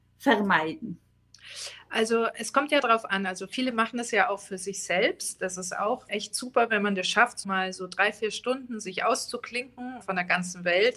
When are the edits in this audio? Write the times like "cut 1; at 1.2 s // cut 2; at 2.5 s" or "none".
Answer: cut 1; at 6.1 s // cut 2; at 7.4 s // cut 3; at 10.0 s